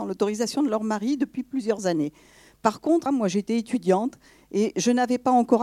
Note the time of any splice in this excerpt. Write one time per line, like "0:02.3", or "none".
0:03.1